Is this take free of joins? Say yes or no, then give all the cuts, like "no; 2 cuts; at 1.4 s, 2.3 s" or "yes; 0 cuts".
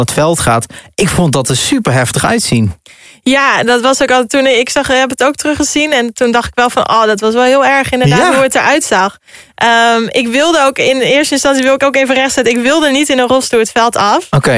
yes; 0 cuts